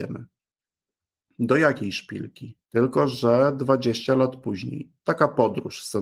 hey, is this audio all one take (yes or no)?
no